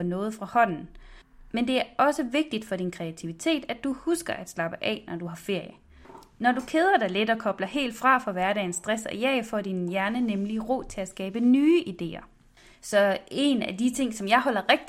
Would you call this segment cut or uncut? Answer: uncut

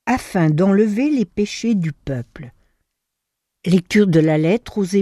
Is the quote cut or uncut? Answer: cut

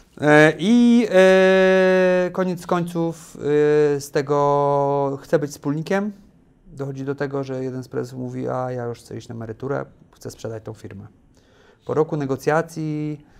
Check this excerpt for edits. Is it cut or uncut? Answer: uncut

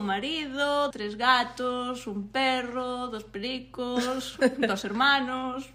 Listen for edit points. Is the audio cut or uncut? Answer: cut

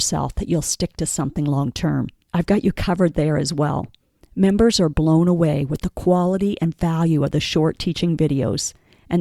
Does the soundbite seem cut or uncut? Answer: cut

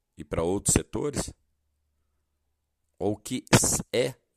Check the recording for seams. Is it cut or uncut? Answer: cut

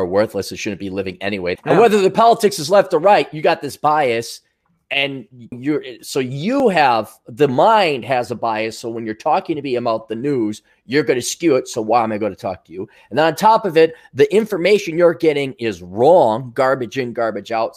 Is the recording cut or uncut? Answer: cut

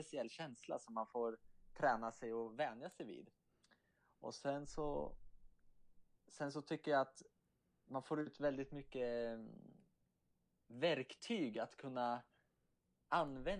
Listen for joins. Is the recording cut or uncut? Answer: uncut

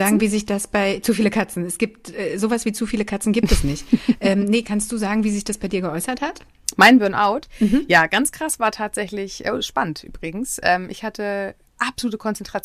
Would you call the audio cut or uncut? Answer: uncut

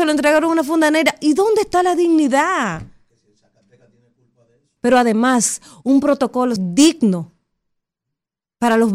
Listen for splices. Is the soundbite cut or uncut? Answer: cut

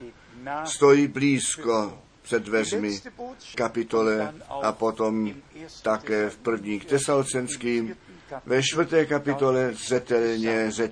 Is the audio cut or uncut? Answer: cut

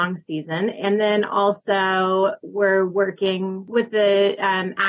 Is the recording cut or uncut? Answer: uncut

